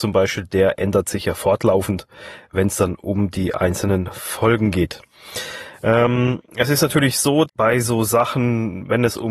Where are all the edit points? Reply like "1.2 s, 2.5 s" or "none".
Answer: 7.5 s